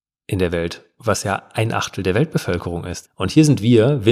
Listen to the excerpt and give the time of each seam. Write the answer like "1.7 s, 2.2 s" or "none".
3.0 s